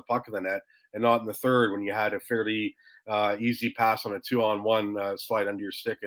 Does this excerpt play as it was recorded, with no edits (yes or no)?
yes